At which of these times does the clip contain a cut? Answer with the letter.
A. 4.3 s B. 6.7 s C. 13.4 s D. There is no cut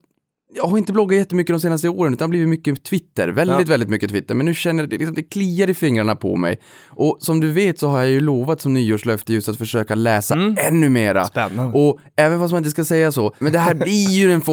C